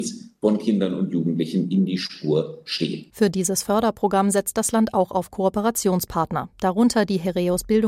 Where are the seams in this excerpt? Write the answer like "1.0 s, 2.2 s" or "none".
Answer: none

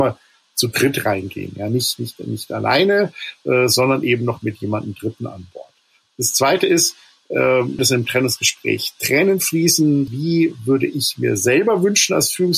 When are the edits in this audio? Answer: 7.8 s, 10.1 s

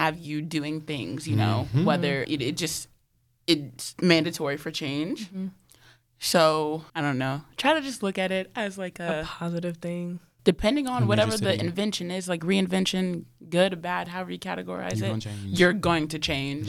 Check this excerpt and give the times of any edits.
2.2 s, 6.9 s, 10.4 s

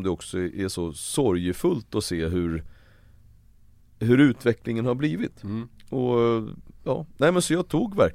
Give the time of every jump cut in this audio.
none

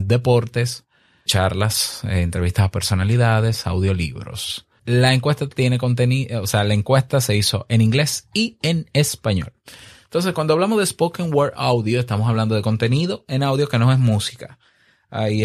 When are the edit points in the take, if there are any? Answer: 1.3 s, 4.8 s

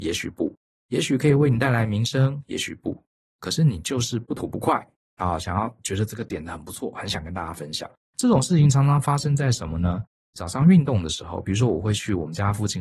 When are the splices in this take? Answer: 8.0 s

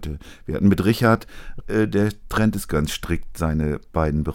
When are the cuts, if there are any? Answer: 1.6 s

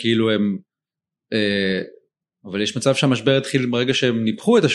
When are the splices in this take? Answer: 2.2 s

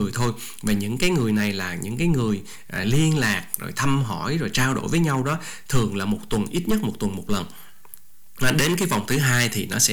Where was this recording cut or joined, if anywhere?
2.8 s

